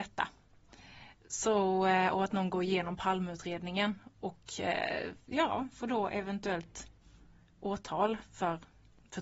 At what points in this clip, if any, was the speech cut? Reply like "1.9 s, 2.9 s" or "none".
none